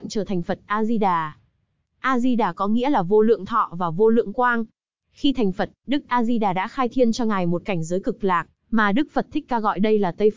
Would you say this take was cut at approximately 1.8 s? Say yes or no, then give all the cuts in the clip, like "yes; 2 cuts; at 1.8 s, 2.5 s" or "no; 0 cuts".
no; 1 cut; at 5.0 s